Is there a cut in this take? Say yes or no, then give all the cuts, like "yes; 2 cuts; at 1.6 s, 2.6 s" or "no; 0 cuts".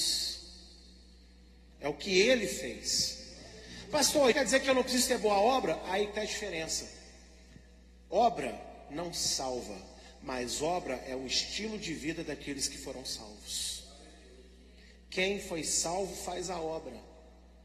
yes; 1 cut; at 4.3 s